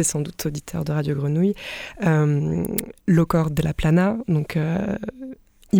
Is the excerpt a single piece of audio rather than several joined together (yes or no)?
yes